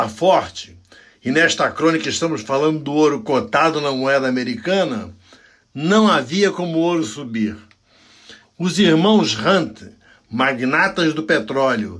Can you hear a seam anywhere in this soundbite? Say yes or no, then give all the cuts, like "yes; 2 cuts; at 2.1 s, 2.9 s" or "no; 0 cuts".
yes; 1 cut; at 8.4 s